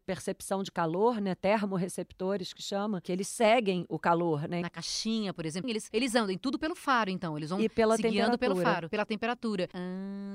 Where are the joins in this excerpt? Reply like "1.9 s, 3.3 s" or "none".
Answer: 4.6 s, 5.6 s